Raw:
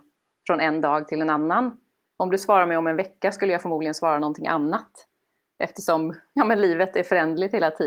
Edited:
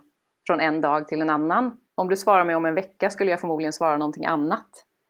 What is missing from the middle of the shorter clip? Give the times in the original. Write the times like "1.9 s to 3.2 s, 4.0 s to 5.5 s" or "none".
1.9 s to 2.1 s